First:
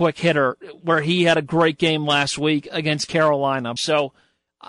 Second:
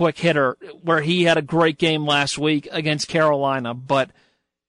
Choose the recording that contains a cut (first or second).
first